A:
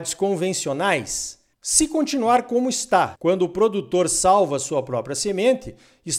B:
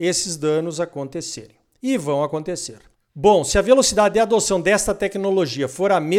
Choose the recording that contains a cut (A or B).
A